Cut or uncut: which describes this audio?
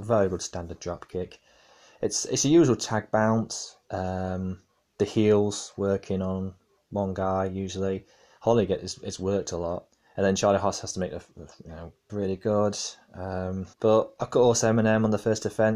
cut